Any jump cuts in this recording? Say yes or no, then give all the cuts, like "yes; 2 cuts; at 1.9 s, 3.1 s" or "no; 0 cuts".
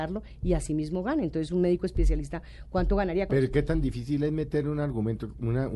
yes; 1 cut; at 3.3 s